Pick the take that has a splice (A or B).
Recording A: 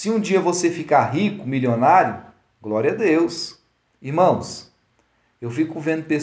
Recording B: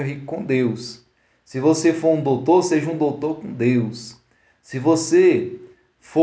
A